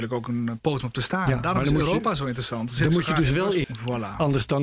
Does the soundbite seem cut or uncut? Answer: cut